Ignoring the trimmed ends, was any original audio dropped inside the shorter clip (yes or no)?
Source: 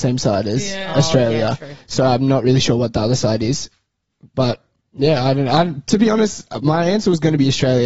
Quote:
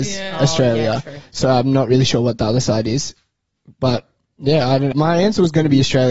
yes